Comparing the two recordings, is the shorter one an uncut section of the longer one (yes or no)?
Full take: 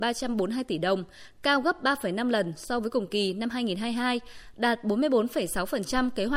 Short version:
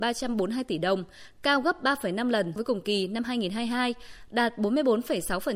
no